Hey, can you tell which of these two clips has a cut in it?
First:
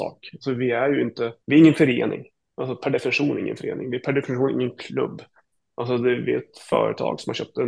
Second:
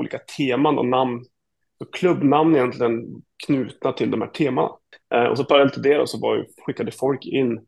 first; 1 cut; at 1.4 s

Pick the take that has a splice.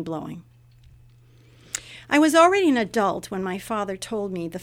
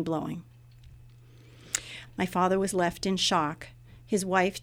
second; 1 cut; at 2.0 s

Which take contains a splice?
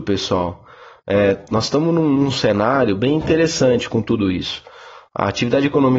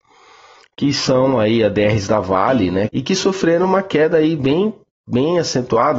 second; 1 cut; at 2.9 s

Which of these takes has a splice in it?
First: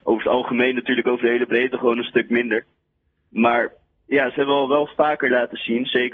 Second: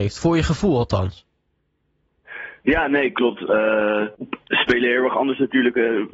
second; 1 cut; at 4.1 s

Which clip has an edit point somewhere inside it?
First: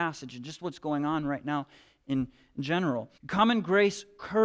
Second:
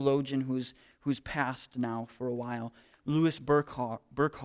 first; 1 cut; at 3.2 s

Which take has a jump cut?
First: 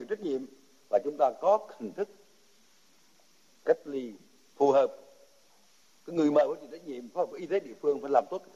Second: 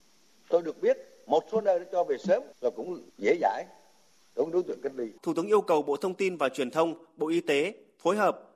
second; 2 cuts; at 3.1 s, 5.2 s

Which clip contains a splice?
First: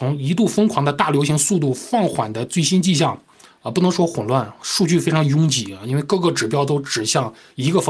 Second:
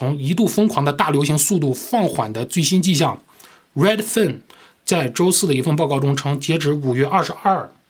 first; 1 cut; at 3.5 s

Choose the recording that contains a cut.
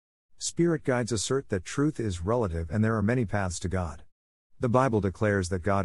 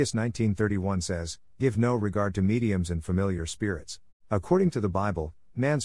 second; 1 cut; at 4.1 s

